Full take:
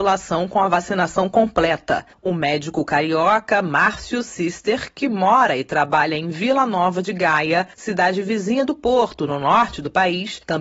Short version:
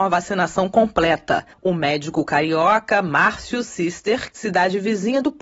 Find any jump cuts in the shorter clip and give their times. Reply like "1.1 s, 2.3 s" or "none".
4.3 s